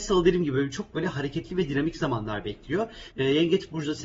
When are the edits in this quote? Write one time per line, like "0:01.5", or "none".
0:03.1